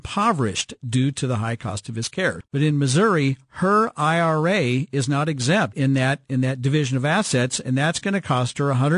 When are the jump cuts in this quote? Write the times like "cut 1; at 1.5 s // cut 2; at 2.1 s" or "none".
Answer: cut 1; at 2.4 s // cut 2; at 5.7 s